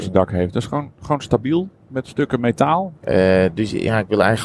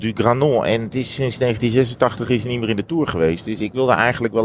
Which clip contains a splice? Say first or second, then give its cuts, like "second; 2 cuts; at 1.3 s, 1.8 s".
first; 1 cut; at 2.9 s